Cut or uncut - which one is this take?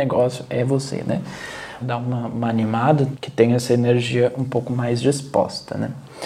cut